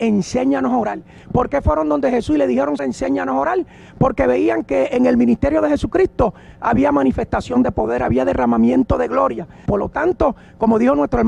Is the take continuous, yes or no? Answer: no